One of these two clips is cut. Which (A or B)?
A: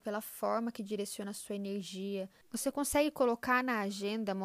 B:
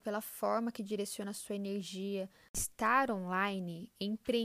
A